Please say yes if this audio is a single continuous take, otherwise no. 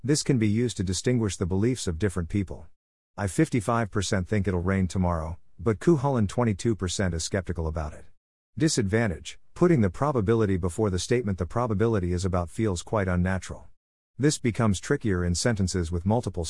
yes